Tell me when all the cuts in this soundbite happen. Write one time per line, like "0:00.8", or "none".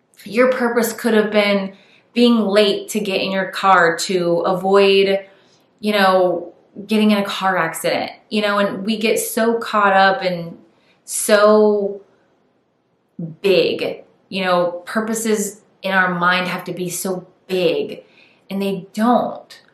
none